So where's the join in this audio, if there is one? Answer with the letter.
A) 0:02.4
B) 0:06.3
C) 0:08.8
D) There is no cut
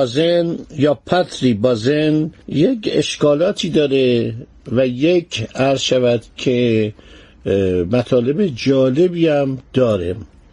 A